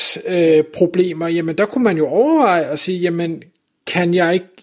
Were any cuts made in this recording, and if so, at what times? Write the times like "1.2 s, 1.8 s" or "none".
none